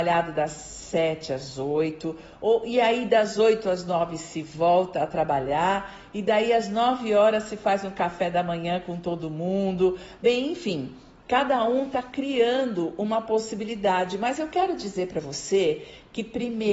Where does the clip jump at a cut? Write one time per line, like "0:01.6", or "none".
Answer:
none